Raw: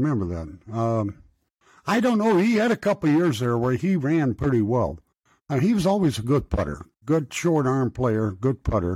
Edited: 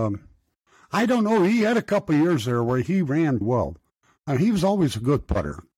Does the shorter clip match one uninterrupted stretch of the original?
no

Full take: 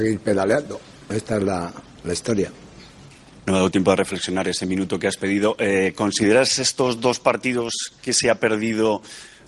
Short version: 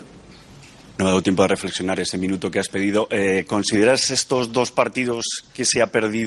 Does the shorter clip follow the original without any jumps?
yes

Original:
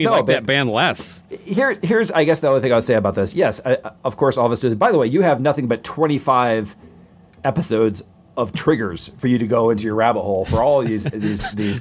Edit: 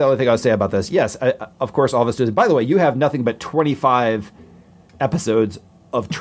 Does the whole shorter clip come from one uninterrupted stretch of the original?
yes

